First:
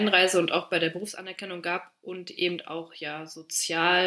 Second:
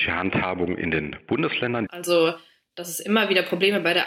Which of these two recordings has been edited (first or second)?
second